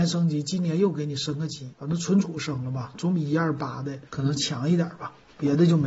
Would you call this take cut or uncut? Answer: cut